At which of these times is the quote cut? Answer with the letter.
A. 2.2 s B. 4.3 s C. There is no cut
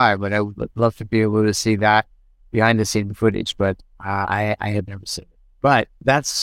C